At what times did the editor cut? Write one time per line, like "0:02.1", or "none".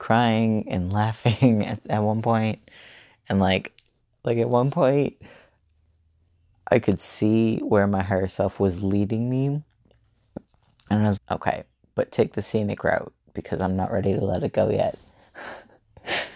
0:11.2